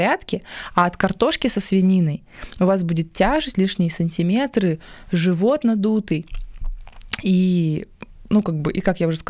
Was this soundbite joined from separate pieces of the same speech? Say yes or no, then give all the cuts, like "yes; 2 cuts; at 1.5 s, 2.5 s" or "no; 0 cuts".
no; 0 cuts